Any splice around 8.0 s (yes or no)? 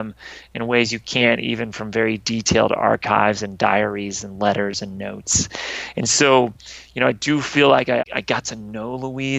yes